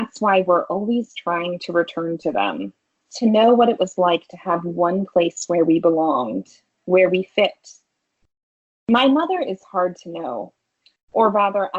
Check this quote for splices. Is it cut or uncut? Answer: uncut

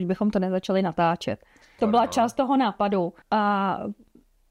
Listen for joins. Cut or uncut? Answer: cut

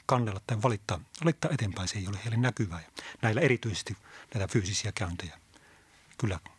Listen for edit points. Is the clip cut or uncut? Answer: uncut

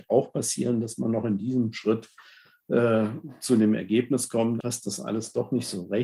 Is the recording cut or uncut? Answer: cut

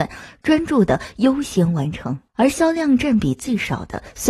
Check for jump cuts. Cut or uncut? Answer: cut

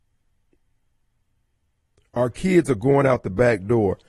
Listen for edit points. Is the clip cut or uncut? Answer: uncut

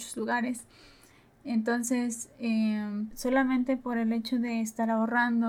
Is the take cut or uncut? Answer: cut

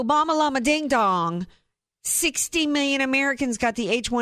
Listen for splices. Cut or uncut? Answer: uncut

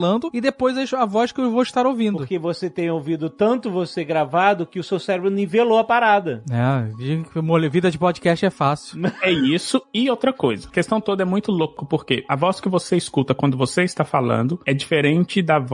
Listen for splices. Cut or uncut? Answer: uncut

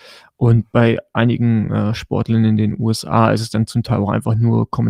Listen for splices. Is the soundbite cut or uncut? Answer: uncut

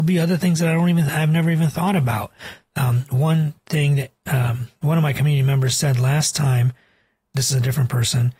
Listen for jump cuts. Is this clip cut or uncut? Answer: uncut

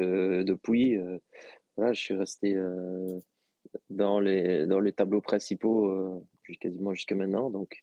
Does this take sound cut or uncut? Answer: uncut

